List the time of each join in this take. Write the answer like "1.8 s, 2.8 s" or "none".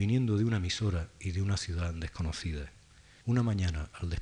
3.2 s